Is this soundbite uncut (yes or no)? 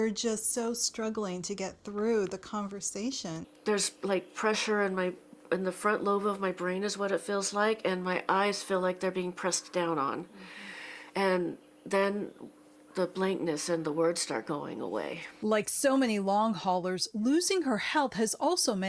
yes